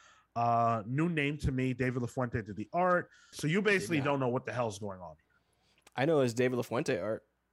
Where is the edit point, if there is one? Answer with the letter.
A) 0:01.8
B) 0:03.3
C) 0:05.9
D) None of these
B